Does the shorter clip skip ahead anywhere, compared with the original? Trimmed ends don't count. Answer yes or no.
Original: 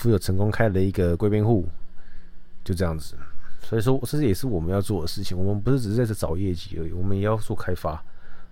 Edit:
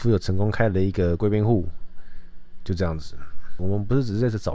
yes